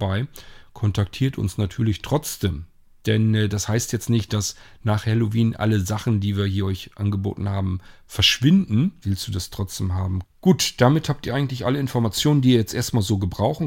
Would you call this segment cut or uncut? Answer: cut